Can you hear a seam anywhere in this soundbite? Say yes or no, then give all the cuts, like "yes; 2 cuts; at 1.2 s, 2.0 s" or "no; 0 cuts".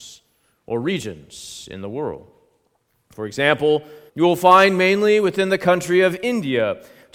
yes; 1 cut; at 4.1 s